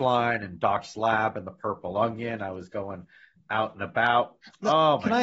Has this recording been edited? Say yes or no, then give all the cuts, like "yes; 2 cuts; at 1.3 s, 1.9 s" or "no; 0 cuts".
no; 0 cuts